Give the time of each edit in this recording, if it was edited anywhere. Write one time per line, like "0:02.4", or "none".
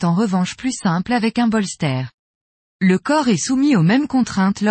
0:02.6